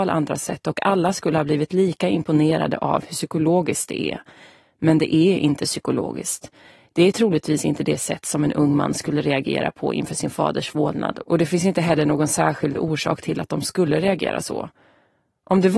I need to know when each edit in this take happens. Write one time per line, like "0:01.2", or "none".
none